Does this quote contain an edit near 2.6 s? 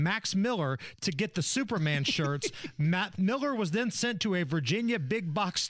no; 0 cuts

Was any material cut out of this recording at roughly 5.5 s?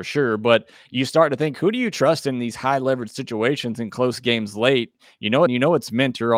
yes; 1 cut; at 5.5 s

